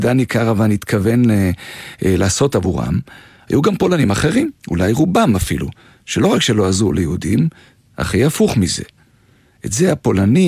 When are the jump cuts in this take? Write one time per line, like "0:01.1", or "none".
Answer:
0:04.6